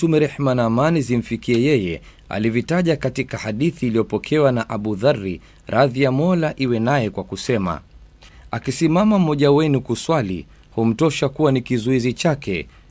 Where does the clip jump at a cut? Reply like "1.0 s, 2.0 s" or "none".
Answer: none

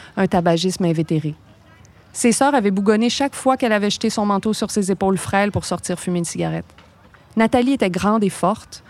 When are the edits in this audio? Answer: 7.2 s

